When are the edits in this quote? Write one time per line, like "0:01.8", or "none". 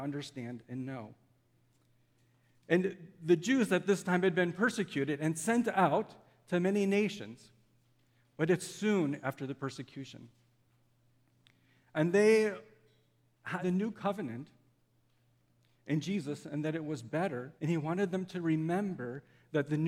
0:13.6
0:17.6